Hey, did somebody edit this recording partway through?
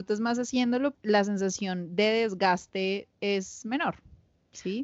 yes; 1 cut; at 0.9 s

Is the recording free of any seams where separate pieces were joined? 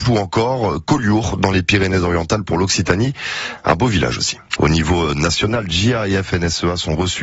no; 1 cut; at 4.6 s

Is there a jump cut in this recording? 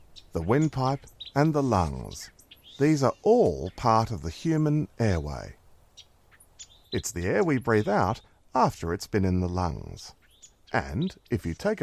yes; 1 cut; at 6.8 s

